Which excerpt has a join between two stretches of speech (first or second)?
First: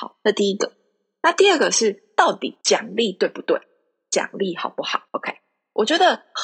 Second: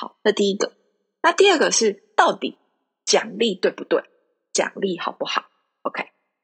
first